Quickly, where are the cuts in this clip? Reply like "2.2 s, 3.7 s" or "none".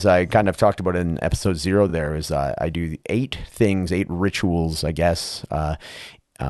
none